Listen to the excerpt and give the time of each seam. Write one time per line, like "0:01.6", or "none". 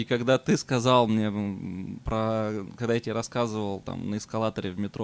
none